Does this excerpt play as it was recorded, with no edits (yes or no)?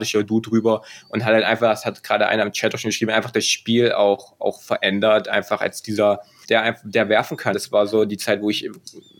no